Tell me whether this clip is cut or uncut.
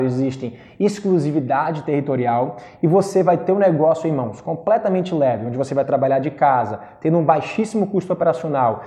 uncut